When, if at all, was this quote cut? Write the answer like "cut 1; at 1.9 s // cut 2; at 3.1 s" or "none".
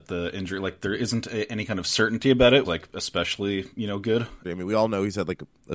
cut 1; at 2.6 s // cut 2; at 4.4 s